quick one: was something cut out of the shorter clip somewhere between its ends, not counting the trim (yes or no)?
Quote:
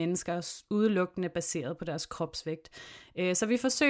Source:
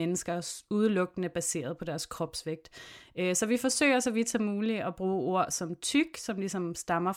no